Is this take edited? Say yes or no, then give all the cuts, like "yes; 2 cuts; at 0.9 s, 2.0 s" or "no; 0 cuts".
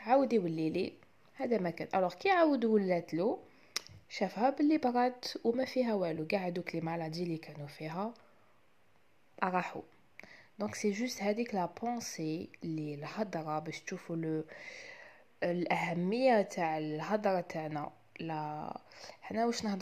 no; 0 cuts